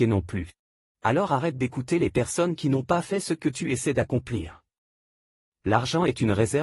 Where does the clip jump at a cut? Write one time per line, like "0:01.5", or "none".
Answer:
0:00.9